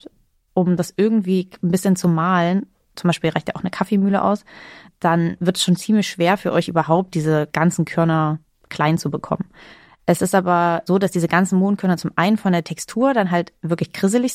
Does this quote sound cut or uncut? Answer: cut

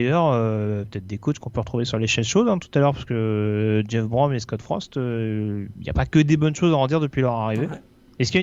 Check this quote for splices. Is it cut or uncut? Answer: uncut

